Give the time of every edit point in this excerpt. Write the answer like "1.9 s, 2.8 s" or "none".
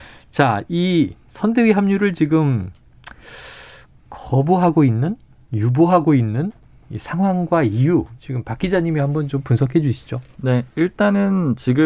none